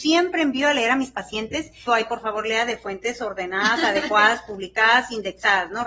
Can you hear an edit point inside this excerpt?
yes; 1 cut; at 1.9 s

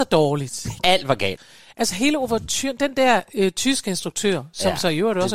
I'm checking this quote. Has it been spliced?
no; 0 cuts

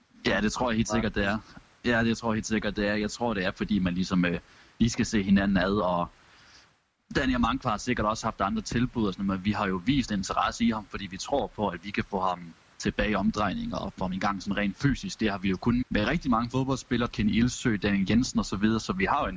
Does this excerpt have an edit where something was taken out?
yes; 2 cuts; at 15.8 s, 17.1 s

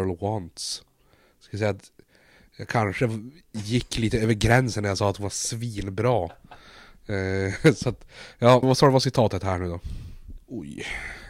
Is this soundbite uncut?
no; 2 cuts; at 8.6 s, 10.4 s

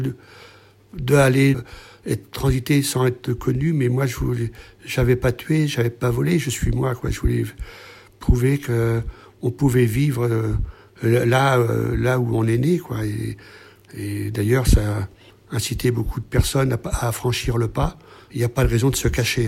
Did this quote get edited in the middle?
yes; 1 cut; at 1.5 s

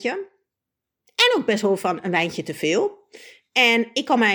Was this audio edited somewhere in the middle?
no; 0 cuts

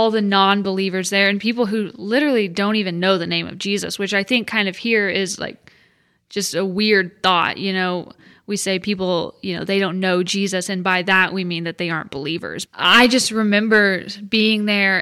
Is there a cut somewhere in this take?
yes; 1 cut; at 12.7 s

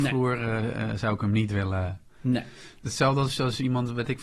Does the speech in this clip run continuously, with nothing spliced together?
yes; 0 cuts

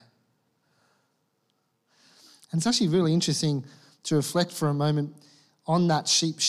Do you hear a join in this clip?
no; 0 cuts

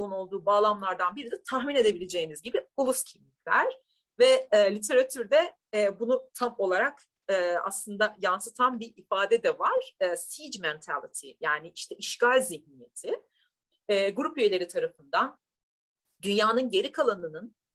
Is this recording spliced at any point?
no; 0 cuts

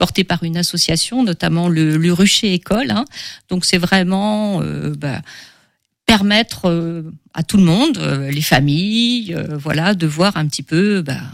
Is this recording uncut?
yes; 0 cuts

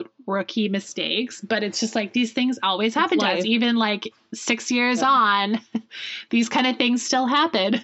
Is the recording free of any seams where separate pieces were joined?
yes; 0 cuts

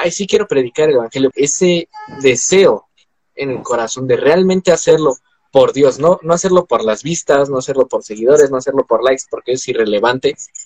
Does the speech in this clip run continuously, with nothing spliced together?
no; 1 cut; at 1.3 s

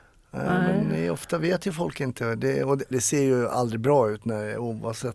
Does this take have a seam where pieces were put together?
yes; 1 cut; at 2.9 s

